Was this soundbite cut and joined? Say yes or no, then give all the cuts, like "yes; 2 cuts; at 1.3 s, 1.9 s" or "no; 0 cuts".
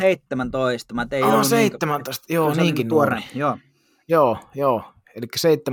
no; 0 cuts